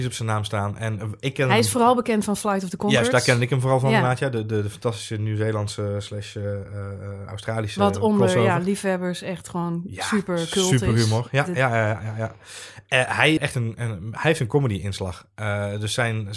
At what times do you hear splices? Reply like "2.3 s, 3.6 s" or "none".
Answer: 13.4 s